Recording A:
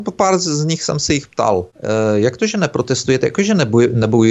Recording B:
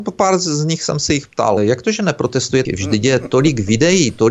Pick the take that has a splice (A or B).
B